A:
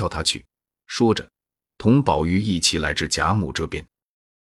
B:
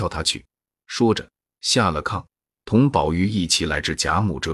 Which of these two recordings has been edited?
A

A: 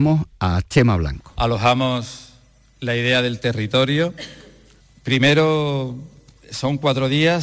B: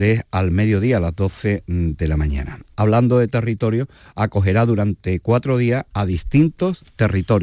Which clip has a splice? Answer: B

